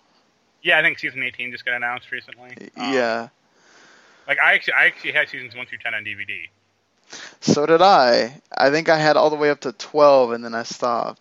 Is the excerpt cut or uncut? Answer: uncut